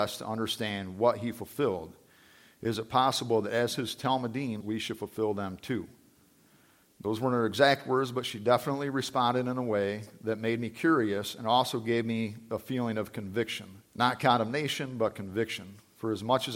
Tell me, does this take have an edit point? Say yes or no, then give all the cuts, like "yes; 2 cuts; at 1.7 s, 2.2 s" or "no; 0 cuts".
yes; 3 cuts; at 4.6 s, 6.8 s, 13.9 s